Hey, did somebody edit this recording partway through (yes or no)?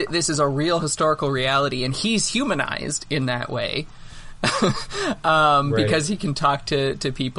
no